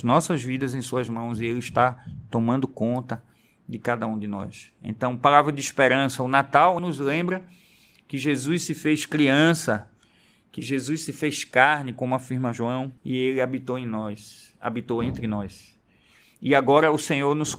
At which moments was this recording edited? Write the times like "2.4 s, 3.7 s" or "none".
6.8 s, 13.0 s